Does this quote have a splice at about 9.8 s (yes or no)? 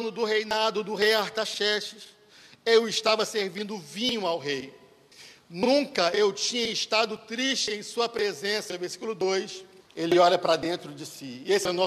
yes